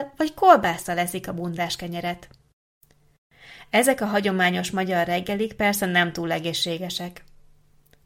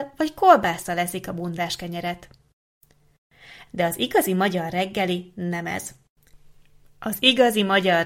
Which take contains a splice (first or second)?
second